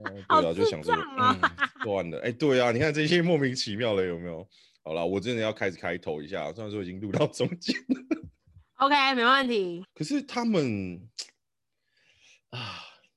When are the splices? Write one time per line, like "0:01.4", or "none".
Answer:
0:09.8